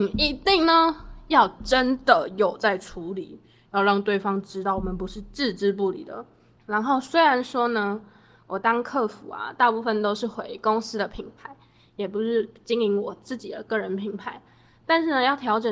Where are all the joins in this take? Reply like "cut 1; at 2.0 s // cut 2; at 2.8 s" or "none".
cut 1; at 6.6 s